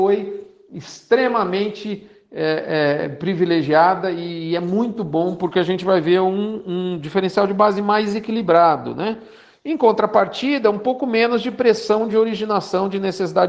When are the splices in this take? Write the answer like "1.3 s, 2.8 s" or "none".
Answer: none